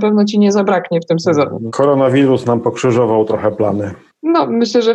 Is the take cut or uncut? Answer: uncut